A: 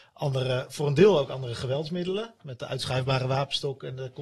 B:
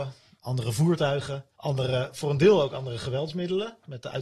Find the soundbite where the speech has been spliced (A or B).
B